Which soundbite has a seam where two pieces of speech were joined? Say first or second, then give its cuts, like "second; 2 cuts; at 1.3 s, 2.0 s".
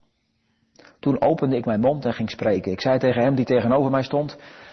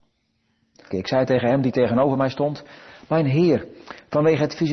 second; 1 cut; at 0.9 s